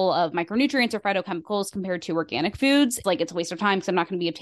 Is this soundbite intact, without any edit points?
no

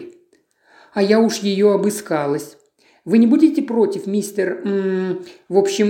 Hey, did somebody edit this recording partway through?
no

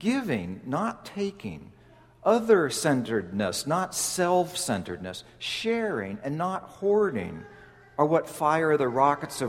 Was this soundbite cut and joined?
no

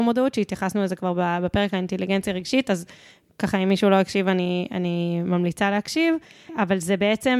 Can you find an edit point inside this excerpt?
yes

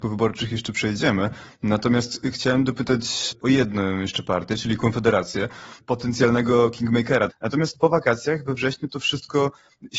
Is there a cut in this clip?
yes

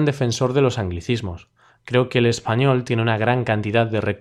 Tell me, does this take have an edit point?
no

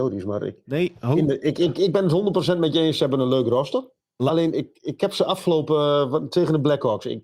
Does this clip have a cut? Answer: no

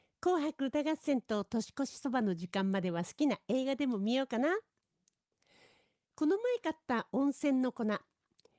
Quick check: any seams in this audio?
no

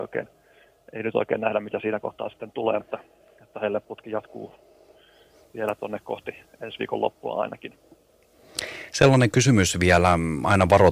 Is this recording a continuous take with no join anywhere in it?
no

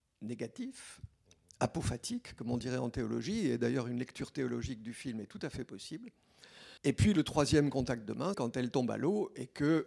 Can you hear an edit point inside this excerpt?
yes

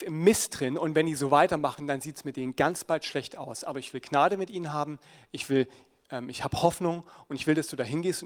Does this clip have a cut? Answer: no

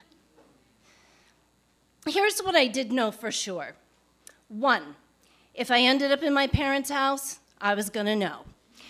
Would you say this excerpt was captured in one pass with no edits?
yes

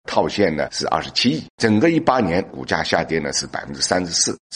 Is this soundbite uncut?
yes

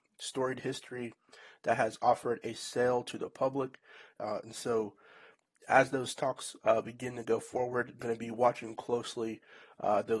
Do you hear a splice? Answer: yes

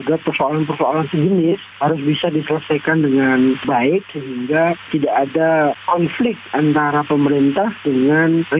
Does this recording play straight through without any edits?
no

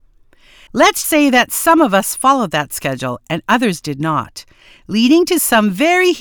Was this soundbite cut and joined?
yes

